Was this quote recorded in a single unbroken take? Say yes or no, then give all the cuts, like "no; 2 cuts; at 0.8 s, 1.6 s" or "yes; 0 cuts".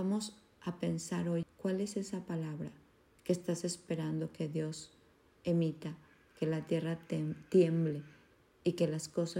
no; 1 cut; at 1.4 s